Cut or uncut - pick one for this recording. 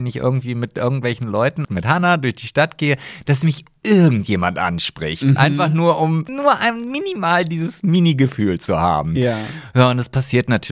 cut